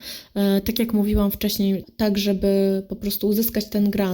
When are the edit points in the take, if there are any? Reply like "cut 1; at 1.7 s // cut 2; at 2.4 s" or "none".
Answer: cut 1; at 1.8 s